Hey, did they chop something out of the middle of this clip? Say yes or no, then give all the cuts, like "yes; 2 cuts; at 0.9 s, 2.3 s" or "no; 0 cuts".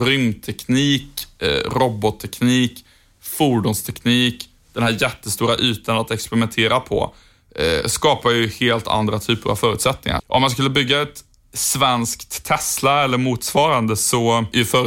yes; 1 cut; at 10.2 s